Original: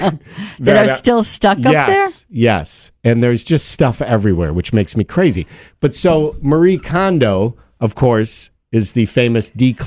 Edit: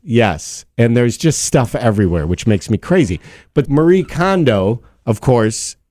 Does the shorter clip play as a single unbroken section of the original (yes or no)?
no